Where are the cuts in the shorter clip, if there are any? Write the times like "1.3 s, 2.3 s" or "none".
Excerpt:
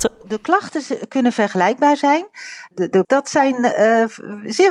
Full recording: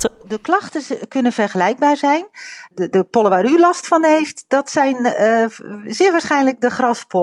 3.0 s